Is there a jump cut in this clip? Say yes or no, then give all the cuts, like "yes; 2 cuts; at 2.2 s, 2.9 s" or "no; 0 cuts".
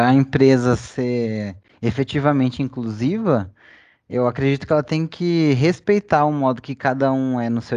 no; 0 cuts